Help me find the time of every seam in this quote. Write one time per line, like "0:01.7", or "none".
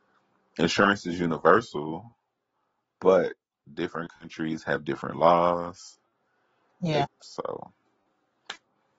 0:07.0